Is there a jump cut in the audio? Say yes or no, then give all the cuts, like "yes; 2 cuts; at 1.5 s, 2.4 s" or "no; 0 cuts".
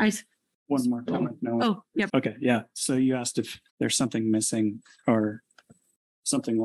yes; 2 cuts; at 2.1 s, 3.7 s